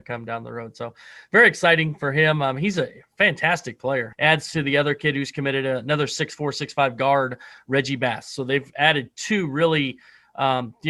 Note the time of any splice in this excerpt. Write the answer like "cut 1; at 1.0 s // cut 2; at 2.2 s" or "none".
cut 1; at 4.1 s